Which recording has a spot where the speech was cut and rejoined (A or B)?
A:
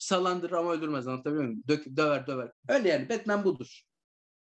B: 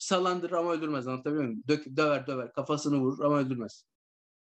A